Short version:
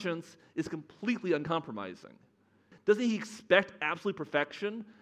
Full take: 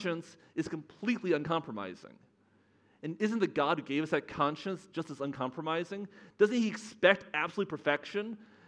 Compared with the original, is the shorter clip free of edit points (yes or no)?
no